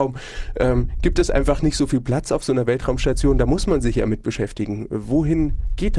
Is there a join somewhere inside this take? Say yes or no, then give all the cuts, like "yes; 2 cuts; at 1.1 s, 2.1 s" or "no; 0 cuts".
no; 0 cuts